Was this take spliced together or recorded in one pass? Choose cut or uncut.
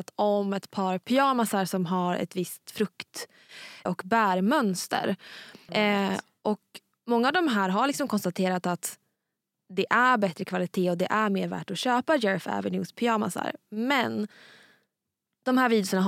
cut